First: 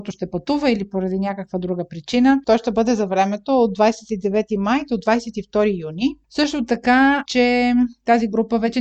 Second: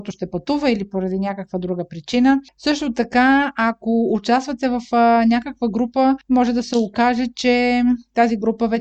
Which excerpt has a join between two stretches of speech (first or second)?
first